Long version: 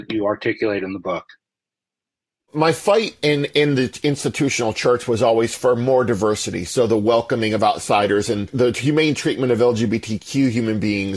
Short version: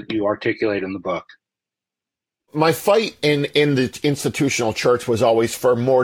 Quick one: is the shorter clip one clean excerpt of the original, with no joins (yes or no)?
yes